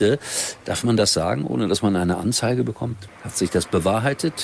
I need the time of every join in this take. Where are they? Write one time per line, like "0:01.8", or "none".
0:03.1